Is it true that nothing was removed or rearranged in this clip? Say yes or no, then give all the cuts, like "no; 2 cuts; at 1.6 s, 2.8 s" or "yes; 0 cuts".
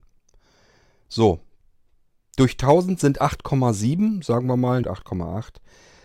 no; 1 cut; at 4.8 s